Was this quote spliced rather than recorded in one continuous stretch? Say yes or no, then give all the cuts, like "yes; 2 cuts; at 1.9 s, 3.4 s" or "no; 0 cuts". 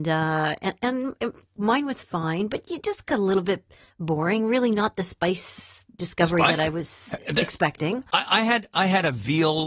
no; 0 cuts